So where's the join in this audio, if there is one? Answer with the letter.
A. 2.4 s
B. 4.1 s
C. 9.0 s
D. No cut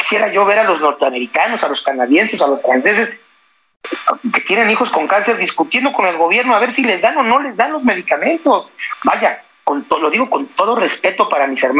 A